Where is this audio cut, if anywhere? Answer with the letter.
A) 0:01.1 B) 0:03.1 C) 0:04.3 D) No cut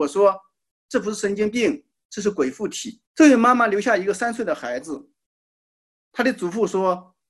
B